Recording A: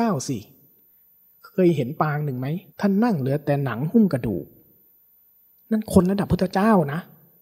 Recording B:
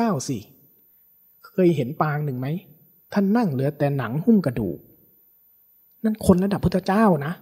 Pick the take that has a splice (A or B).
A